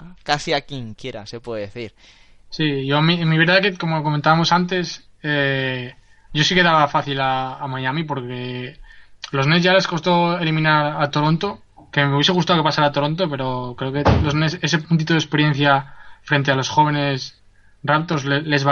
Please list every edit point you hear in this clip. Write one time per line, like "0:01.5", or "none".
none